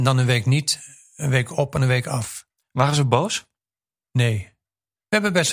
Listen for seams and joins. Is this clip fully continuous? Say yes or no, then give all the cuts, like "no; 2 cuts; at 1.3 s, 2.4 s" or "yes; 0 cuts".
yes; 0 cuts